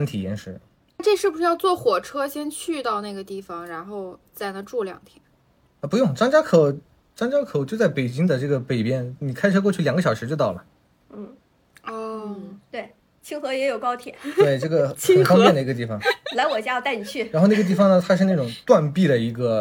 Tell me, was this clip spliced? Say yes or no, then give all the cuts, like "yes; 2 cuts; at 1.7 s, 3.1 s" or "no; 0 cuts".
no; 0 cuts